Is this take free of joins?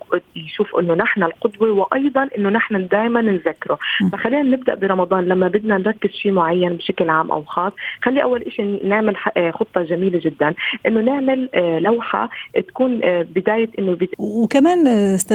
no; 1 cut; at 14.1 s

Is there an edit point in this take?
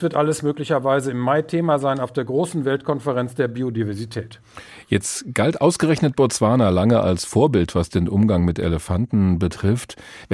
no; 0 cuts

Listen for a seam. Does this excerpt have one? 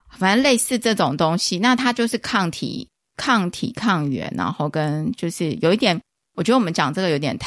no; 0 cuts

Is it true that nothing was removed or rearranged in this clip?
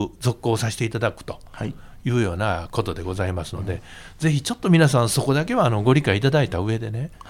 yes; 0 cuts

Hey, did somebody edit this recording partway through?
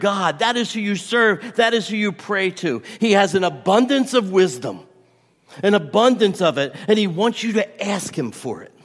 no; 0 cuts

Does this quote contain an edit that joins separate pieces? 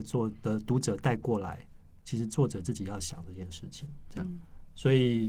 no; 0 cuts

